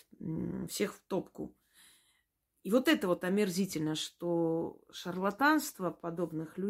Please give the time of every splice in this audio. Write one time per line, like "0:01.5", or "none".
none